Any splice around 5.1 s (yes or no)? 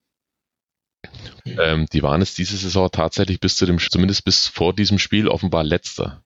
no